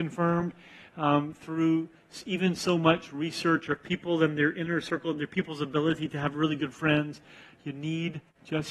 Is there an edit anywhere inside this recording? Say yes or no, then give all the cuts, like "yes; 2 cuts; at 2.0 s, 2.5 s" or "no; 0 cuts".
no; 0 cuts